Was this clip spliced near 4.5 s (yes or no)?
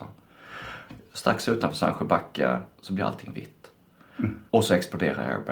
yes